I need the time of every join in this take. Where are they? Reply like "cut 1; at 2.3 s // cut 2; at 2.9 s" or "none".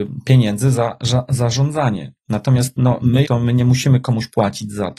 cut 1; at 3.2 s